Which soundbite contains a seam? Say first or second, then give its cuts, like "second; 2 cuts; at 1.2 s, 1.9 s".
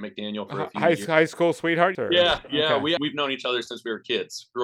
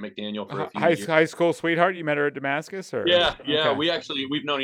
first; 2 cuts; at 1.9 s, 3.0 s